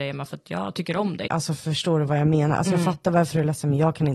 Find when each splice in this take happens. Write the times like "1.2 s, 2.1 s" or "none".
1.3 s